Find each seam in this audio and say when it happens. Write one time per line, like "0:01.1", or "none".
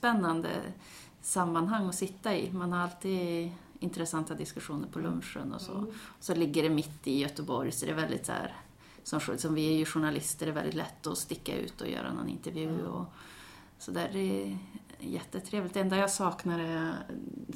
none